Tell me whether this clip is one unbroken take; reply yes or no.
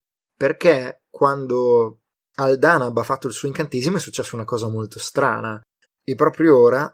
no